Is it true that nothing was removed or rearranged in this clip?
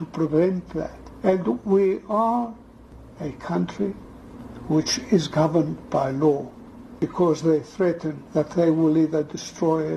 no; 2 cuts; at 7.0 s, 8.3 s

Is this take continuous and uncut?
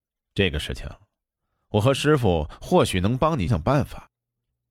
no; 1 cut; at 3.5 s

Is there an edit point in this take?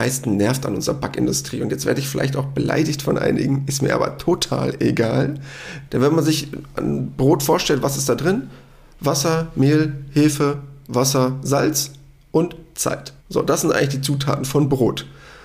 yes; 2 cuts; at 5.9 s, 13.2 s

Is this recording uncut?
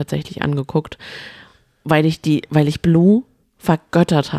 yes; 0 cuts

